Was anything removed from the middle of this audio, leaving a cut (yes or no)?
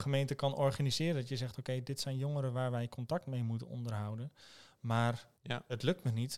yes